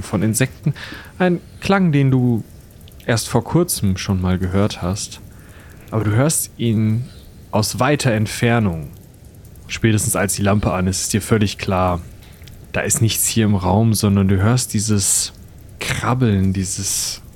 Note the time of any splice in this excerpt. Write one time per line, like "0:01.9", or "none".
0:09.6